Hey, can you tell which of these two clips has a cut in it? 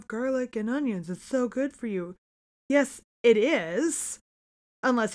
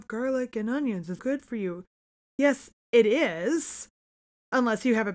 second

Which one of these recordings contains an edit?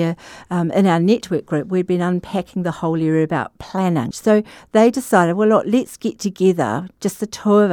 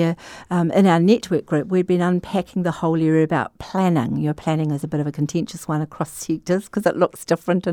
first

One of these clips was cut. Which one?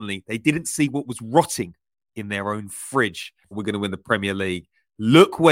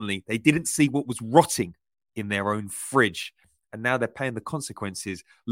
first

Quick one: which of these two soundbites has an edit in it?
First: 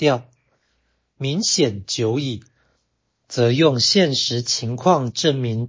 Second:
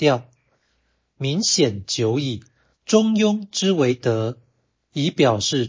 second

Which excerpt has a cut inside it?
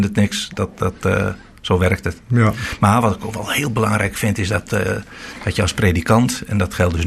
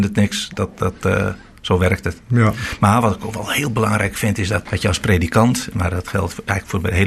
second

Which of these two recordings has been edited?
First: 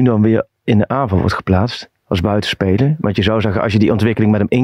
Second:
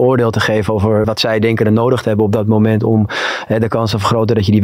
second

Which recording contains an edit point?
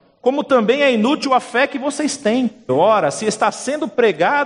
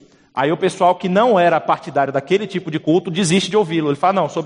first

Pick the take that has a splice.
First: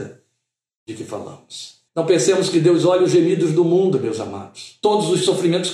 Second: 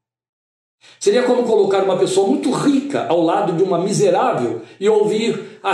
first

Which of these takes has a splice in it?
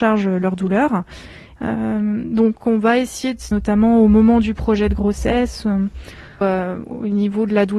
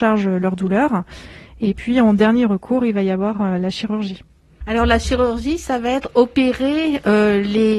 first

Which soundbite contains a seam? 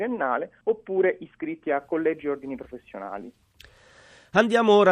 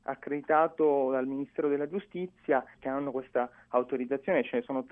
second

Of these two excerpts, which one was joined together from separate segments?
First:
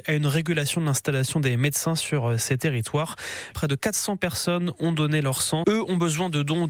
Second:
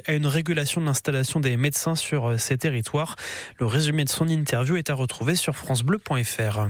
first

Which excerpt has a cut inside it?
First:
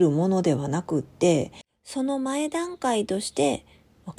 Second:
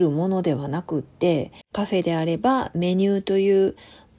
second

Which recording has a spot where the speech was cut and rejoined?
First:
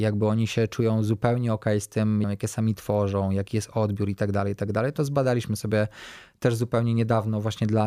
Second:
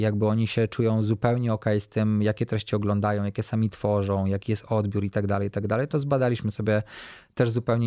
first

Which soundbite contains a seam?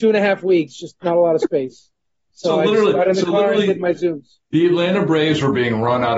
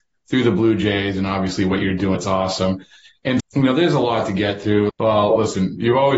second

